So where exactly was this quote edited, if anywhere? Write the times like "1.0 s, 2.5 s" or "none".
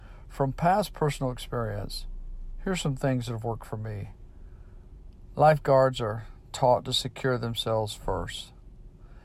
5.3 s